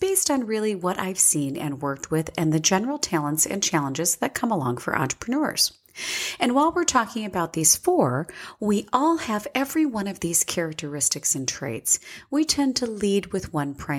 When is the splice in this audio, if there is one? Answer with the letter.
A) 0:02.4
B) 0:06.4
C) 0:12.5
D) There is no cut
C